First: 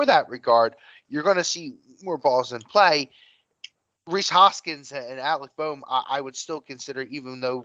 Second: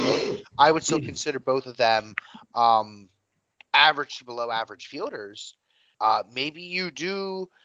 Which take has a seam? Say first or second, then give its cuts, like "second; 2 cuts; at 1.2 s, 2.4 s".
second; 1 cut; at 5.9 s